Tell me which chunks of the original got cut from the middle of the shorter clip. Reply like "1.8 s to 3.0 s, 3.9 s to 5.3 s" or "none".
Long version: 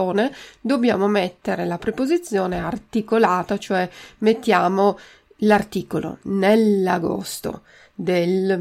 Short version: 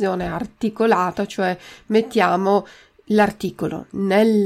none